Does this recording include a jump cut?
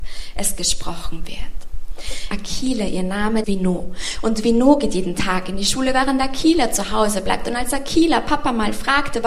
yes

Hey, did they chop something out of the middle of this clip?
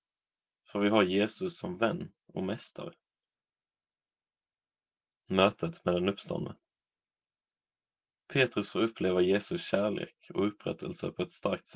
no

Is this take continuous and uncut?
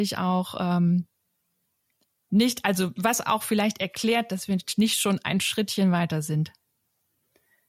yes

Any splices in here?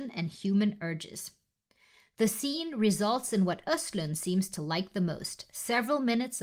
no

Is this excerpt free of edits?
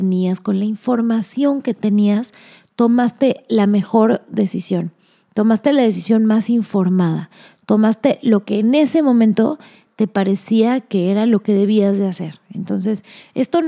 yes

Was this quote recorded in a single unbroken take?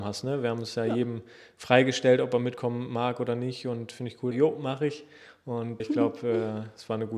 no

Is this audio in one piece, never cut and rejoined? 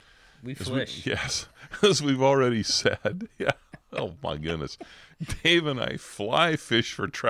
yes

